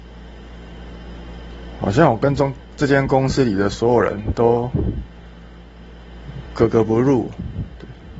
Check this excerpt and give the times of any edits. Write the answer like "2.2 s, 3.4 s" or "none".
none